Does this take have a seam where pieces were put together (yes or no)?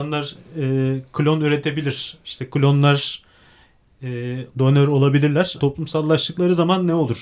yes